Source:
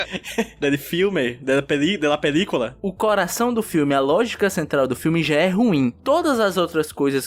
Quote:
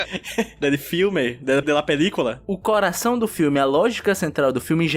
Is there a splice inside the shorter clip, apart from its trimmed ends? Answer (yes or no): yes